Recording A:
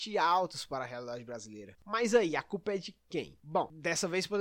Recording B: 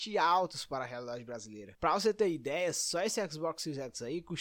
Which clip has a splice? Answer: A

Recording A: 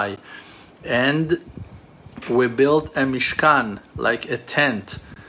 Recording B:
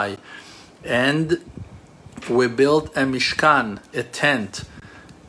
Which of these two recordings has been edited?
B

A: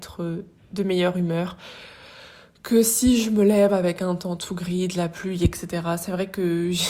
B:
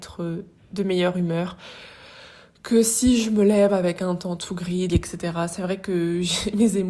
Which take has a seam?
B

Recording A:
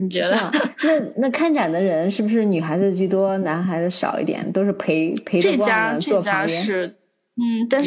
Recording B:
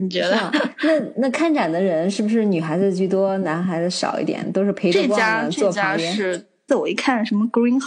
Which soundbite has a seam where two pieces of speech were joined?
B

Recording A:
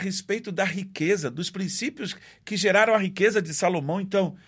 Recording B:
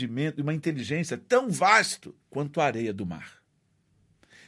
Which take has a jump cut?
B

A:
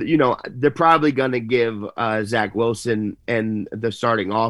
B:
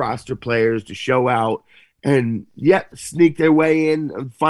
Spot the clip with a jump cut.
B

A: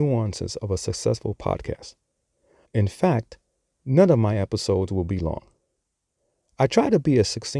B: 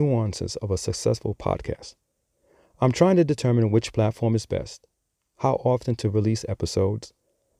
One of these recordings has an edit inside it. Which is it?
A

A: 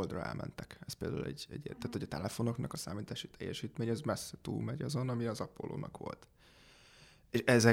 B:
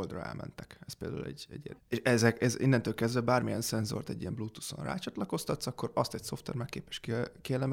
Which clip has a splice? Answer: B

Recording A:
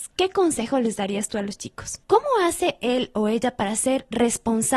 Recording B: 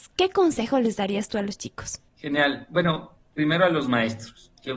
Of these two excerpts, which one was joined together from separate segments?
A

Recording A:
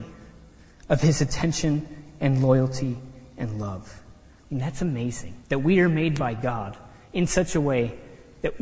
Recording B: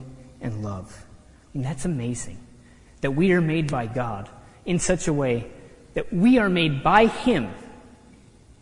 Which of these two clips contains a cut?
A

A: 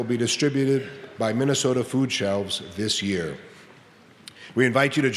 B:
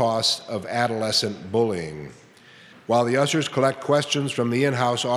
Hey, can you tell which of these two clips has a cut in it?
B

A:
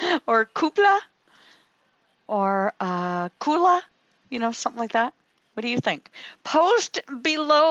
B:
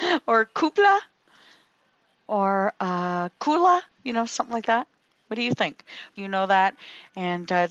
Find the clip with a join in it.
B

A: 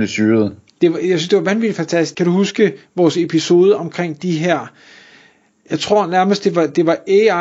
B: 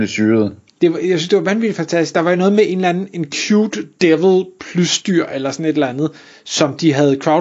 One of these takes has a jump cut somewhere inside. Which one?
A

